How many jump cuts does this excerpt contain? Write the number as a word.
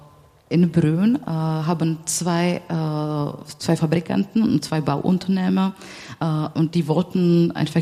one